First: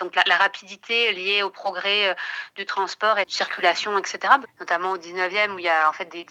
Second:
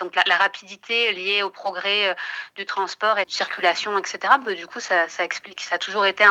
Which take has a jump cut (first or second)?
first